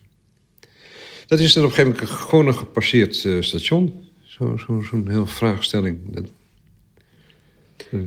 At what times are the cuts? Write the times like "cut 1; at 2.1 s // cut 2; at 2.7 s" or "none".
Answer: none